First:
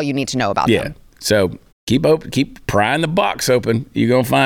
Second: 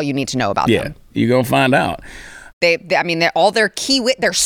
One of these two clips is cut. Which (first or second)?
second